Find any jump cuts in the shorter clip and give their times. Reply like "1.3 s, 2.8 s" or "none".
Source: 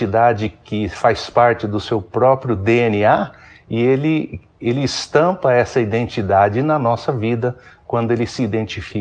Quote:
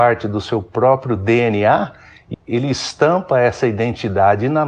2.3 s